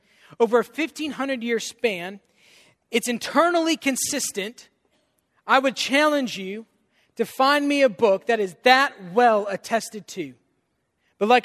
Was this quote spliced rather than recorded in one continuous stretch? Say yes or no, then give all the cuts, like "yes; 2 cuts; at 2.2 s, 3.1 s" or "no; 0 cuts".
yes; 1 cut; at 5.3 s